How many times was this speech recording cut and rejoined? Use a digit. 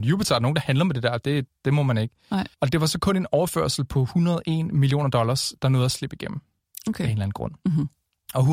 2